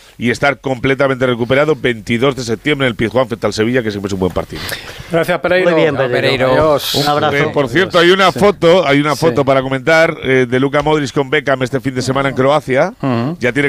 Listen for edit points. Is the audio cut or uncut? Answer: uncut